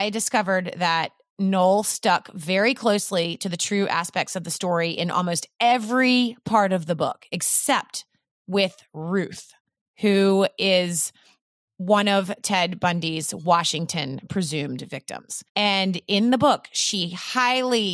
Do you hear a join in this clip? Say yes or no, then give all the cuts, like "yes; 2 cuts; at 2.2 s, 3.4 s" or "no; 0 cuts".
no; 0 cuts